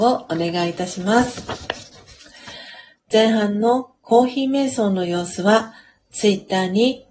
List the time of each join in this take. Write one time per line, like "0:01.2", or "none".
0:02.9